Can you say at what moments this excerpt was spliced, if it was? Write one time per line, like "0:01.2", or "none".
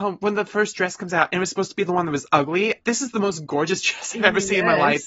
0:02.8